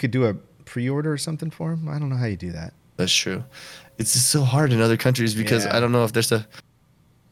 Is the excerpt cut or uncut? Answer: uncut